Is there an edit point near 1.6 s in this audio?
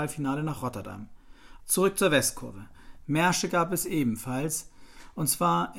yes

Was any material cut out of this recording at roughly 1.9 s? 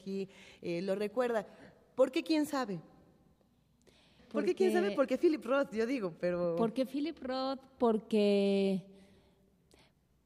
no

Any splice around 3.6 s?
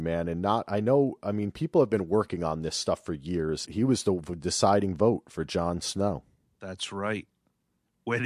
yes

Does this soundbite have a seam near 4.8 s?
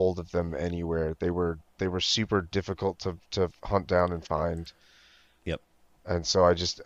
no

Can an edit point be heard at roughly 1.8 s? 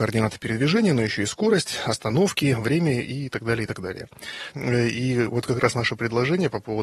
no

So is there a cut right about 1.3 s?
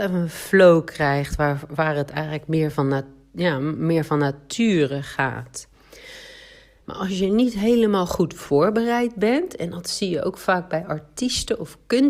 no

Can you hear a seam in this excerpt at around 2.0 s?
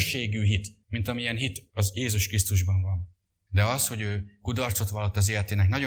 no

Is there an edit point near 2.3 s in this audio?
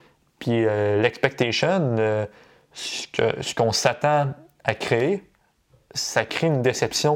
no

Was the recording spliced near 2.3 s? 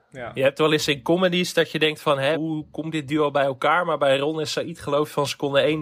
yes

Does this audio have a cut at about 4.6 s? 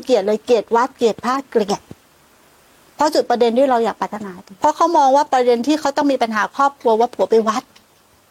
yes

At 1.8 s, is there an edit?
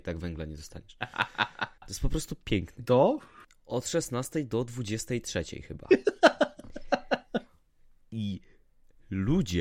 yes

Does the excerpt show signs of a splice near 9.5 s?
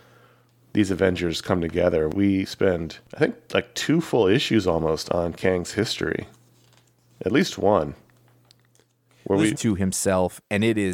yes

